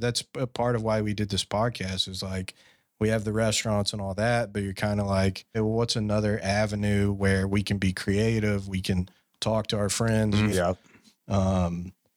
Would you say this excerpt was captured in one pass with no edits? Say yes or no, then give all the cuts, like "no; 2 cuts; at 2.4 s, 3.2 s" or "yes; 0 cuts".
no; 2 cuts; at 5.5 s, 10.5 s